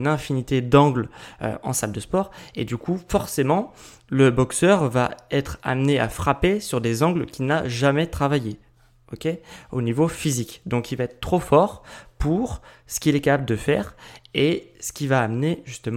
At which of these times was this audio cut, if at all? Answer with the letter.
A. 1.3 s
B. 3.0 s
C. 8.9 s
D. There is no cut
D